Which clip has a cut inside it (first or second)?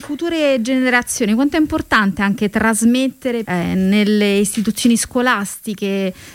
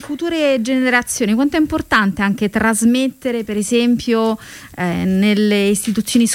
first